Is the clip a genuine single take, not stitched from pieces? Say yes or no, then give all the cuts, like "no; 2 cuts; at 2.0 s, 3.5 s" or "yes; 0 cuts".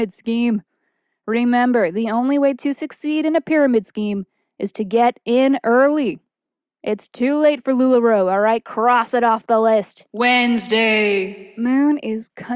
yes; 0 cuts